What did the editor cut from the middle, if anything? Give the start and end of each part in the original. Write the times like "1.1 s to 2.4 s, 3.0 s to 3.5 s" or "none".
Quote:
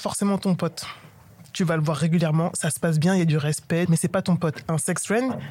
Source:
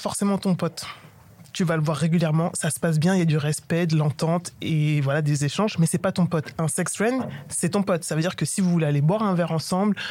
3.9 s to 5.8 s